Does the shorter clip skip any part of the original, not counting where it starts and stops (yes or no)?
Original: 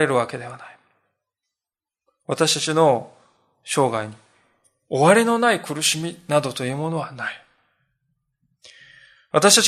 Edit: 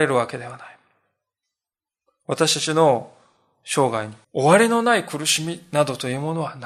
yes